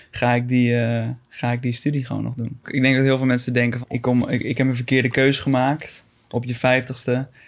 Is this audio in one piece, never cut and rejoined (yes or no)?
no